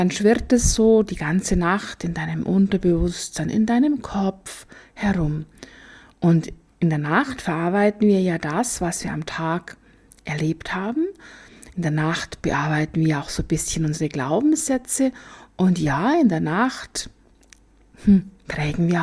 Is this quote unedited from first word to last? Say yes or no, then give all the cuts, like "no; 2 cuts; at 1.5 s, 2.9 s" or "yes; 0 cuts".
yes; 0 cuts